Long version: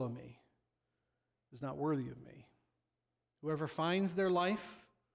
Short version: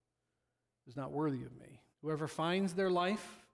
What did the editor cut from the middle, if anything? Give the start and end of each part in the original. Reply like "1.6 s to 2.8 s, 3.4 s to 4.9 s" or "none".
2.6 s to 3.3 s